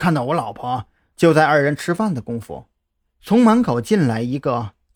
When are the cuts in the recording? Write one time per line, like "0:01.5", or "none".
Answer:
0:01.1